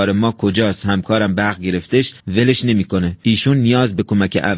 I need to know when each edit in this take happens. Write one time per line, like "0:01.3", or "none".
0:02.2